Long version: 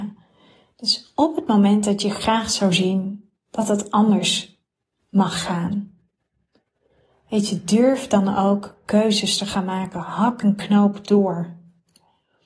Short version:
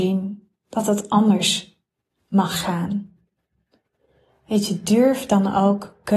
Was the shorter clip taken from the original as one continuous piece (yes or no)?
yes